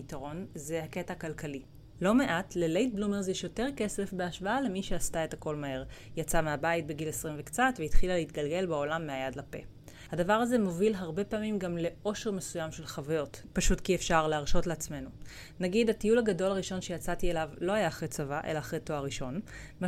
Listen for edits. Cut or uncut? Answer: uncut